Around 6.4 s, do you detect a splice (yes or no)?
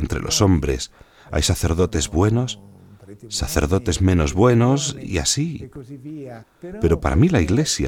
yes